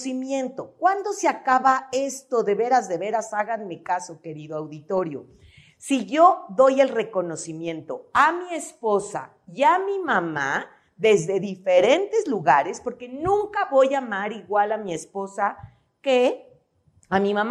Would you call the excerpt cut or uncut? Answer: uncut